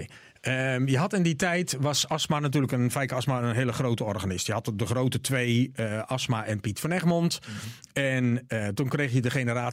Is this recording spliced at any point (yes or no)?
no